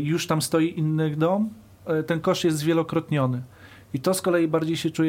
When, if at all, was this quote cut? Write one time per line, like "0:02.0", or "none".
none